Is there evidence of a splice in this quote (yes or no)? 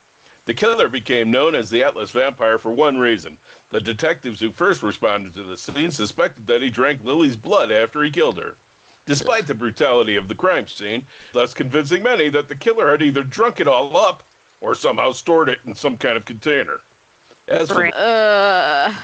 yes